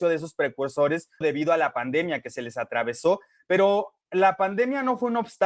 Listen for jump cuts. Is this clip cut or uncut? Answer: cut